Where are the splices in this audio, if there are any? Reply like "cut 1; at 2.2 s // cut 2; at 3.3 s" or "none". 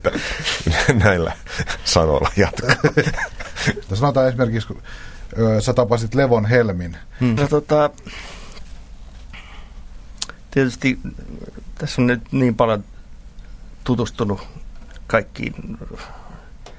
cut 1; at 3.9 s // cut 2; at 7.4 s